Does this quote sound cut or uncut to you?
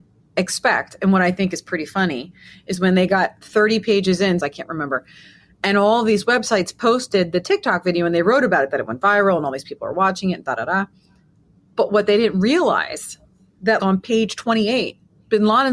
cut